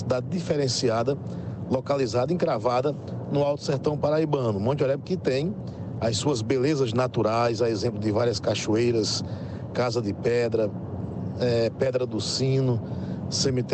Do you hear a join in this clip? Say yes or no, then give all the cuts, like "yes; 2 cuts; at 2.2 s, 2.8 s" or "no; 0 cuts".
no; 0 cuts